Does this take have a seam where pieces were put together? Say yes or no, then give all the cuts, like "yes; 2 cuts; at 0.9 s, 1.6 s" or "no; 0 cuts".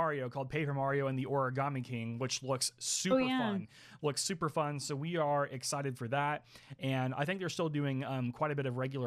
no; 0 cuts